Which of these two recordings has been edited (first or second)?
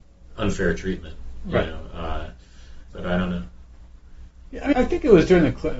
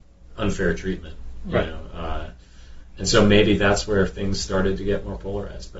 first